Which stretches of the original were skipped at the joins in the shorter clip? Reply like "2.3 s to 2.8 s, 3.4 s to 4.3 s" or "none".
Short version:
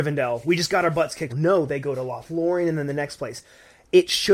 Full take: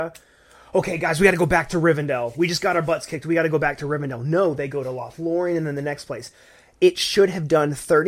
3.2 s to 4.2 s

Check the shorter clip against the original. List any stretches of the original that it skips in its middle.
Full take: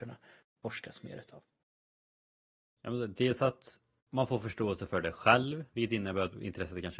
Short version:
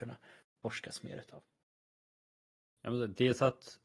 none

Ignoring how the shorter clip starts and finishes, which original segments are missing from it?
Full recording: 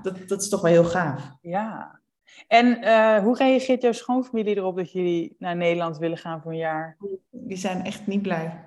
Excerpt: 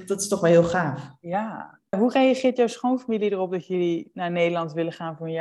2.1 s to 3.2 s

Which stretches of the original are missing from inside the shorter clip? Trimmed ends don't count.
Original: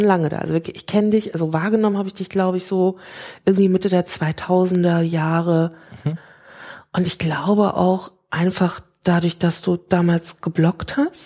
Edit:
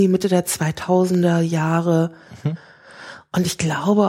none

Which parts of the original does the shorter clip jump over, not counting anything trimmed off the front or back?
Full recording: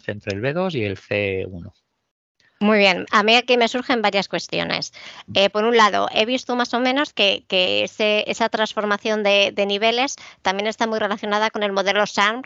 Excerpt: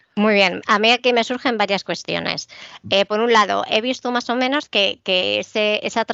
none

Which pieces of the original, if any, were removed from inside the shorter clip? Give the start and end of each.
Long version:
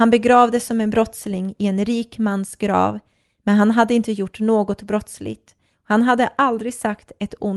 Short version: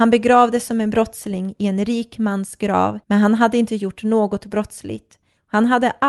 3.0 s to 3.4 s

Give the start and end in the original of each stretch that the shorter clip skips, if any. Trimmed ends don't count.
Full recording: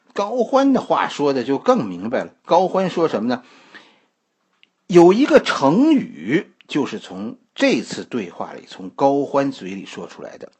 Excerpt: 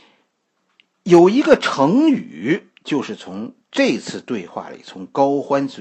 none

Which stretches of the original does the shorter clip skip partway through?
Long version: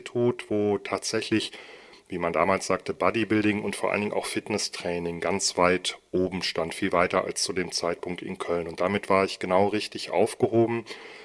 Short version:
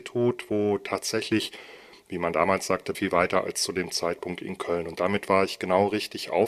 2.9 s to 6.8 s

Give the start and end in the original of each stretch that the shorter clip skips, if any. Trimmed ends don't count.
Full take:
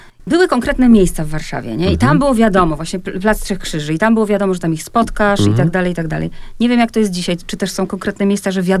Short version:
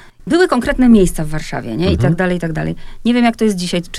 2.0 s to 5.5 s

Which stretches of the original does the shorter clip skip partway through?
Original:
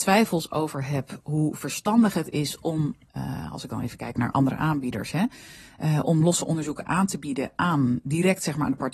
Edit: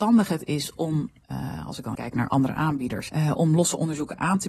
3.8 s to 4.0 s, 5.1 s to 5.8 s

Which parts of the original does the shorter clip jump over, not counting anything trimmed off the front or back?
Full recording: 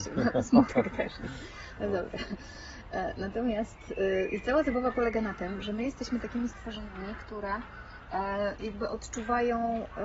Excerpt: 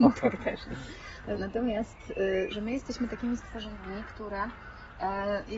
1.9 s to 3.1 s, 4.3 s to 5.6 s

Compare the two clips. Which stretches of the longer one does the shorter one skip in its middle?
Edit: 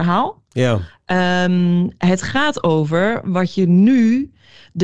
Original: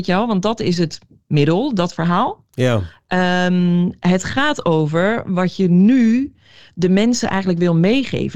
none

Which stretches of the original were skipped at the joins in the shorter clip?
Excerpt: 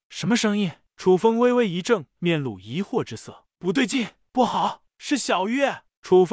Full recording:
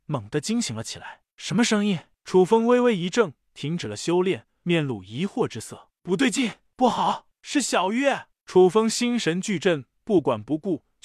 3.4 s to 4.6 s

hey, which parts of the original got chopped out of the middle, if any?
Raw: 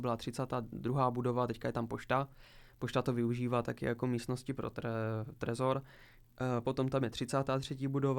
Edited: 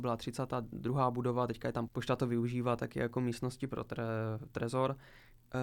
1.9 s to 2.7 s

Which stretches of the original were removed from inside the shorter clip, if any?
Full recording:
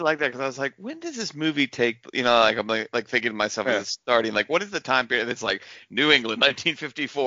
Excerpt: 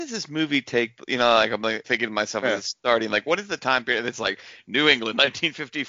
2.9 s to 3.1 s

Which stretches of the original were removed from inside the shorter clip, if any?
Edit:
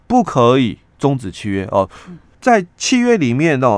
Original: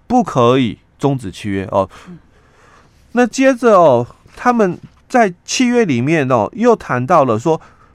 2.3 s to 5.0 s

